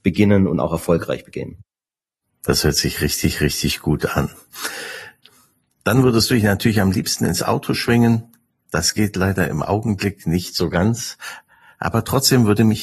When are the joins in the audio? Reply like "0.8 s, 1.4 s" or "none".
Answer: none

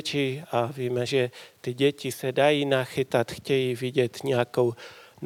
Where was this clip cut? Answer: 1.1 s

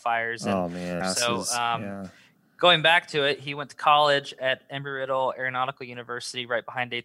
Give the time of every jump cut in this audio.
1.0 s

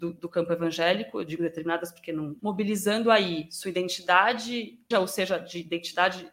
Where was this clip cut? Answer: 2.4 s, 4.9 s

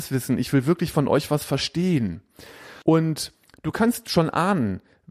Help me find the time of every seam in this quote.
2.8 s

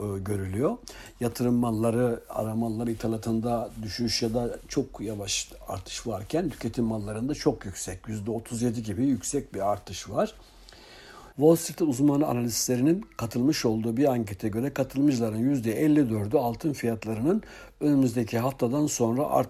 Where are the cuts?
11.3 s

